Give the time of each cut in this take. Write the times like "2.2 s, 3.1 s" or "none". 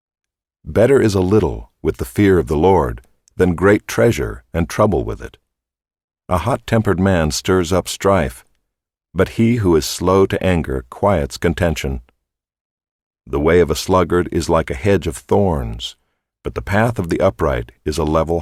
6.2 s